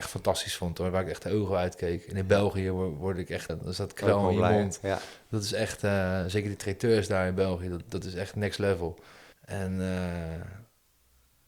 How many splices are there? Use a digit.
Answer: 2